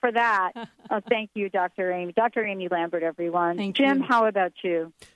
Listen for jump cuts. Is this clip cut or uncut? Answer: uncut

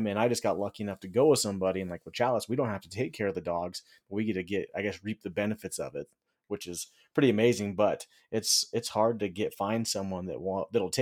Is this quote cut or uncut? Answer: uncut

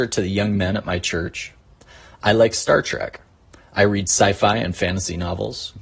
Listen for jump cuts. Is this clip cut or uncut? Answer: uncut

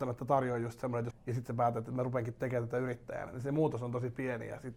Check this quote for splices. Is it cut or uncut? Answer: cut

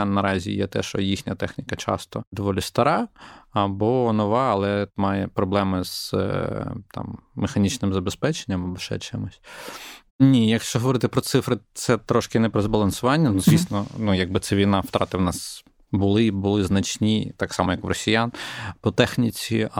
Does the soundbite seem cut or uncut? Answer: cut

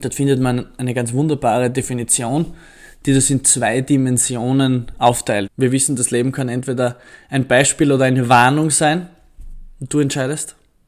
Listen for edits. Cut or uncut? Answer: cut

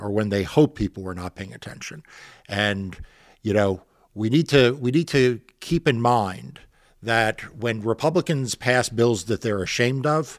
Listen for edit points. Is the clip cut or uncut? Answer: uncut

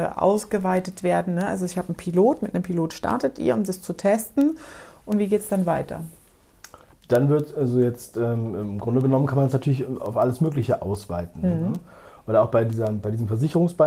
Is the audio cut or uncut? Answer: uncut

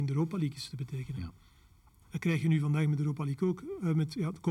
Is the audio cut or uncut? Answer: cut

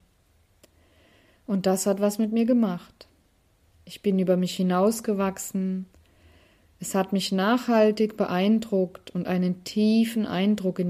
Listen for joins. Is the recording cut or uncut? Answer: uncut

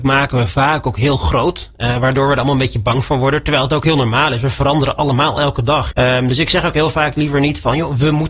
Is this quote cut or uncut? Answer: cut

